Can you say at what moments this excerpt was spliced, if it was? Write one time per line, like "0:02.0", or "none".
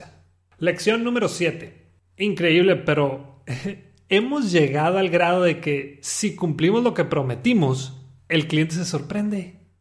0:02.0